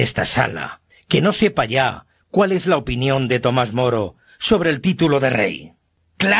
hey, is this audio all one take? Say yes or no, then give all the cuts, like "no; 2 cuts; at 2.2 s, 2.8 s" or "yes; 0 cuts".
no; 1 cut; at 0.9 s